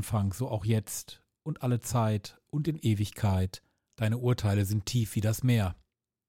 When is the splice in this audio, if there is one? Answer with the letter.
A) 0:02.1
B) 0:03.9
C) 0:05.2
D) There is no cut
B